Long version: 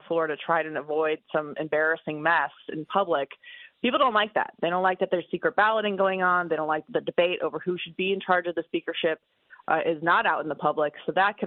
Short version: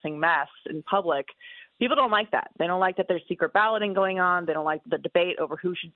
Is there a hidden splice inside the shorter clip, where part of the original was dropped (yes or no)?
no